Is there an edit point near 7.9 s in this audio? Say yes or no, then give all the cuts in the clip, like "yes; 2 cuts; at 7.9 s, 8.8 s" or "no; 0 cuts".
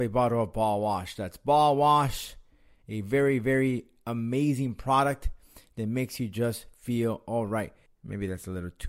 yes; 1 cut; at 7.9 s